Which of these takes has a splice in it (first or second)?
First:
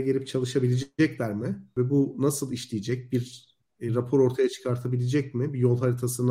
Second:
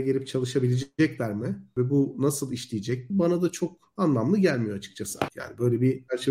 second